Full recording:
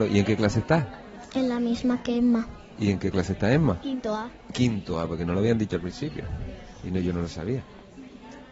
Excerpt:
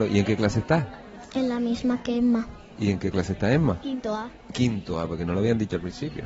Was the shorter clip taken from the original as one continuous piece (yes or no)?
yes